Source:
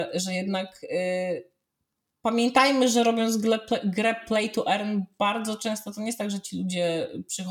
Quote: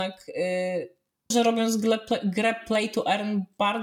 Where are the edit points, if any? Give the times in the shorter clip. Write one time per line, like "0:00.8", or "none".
0:01.3